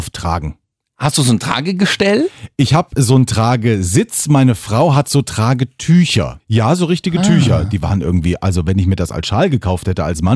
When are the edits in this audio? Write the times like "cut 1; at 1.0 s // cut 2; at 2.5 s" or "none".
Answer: cut 1; at 6.4 s